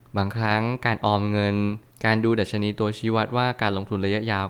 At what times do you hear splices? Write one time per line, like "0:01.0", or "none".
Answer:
none